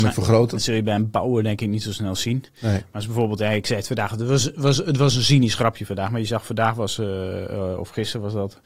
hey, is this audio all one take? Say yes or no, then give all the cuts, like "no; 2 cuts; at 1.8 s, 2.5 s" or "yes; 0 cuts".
yes; 0 cuts